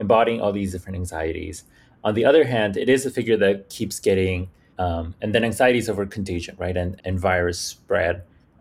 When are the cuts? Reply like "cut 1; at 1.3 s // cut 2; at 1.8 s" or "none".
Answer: cut 1; at 4.7 s // cut 2; at 7.0 s

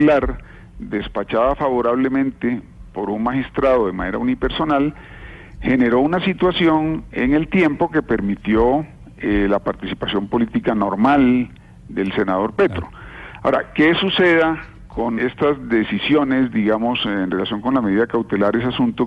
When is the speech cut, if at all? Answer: cut 1; at 15.2 s

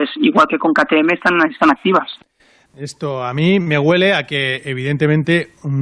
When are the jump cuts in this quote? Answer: cut 1; at 2.7 s

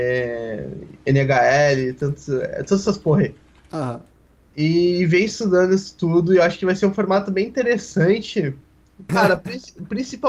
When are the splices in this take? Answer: cut 1; at 9.1 s

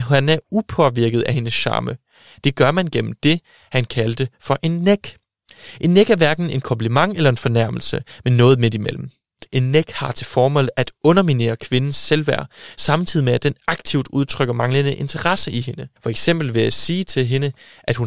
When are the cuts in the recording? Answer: cut 1; at 9.5 s // cut 2; at 16.0 s

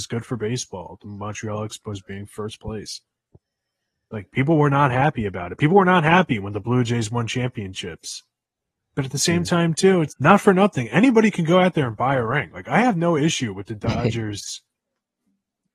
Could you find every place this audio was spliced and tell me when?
cut 1; at 10.1 s

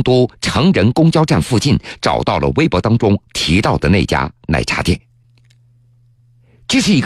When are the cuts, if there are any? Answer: none

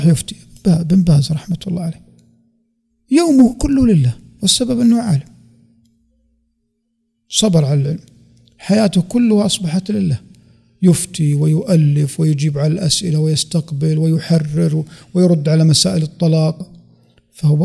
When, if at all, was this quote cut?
cut 1; at 16.6 s

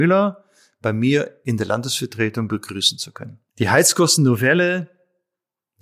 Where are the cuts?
cut 1; at 3.5 s

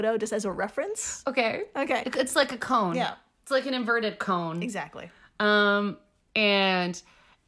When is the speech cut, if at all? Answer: cut 1; at 2.0 s

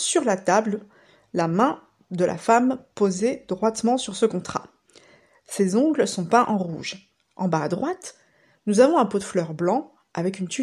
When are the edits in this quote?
cut 1; at 7.2 s // cut 2; at 8.5 s

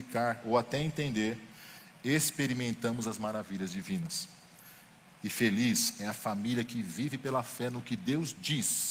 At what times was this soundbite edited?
none

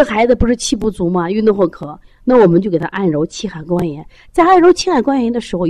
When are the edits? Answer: none

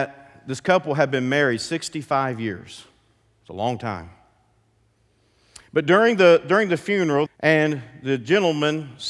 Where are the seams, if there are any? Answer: cut 1; at 7.3 s

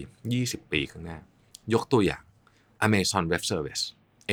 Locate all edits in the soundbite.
cut 1; at 2.8 s

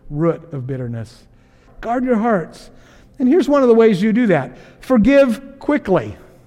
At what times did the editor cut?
cut 1; at 1.7 s

